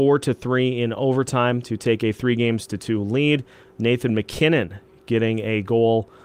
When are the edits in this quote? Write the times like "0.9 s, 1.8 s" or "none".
none